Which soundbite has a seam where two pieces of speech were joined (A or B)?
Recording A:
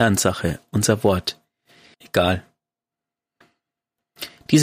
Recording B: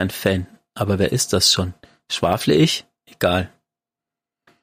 A